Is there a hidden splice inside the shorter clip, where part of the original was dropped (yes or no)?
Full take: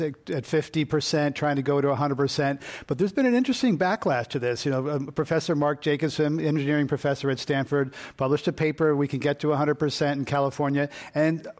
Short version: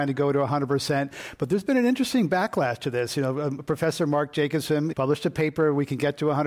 yes